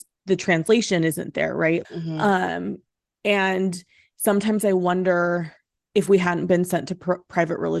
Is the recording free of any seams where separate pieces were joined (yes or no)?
no